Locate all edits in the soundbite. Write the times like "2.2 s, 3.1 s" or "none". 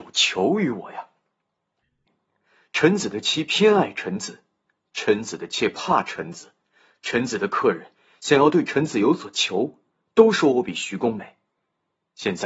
2.1 s